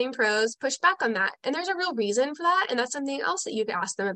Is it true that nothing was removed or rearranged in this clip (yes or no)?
yes